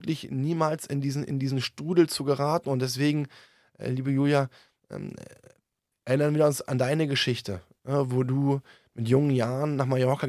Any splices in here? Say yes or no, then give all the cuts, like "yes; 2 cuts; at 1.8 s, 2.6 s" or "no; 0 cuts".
no; 0 cuts